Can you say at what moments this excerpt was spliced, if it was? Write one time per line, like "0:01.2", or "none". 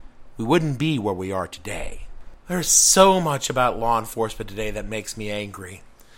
none